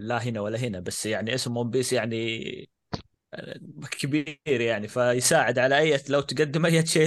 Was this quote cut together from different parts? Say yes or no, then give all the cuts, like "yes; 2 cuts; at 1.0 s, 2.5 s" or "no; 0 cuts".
no; 0 cuts